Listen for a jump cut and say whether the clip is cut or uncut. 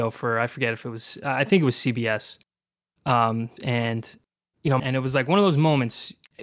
cut